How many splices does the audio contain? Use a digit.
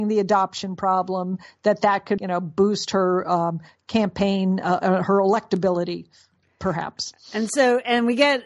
1